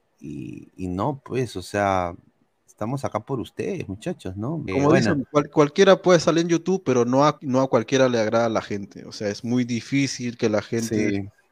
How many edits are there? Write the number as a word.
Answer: two